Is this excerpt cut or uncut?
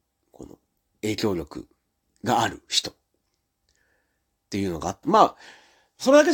uncut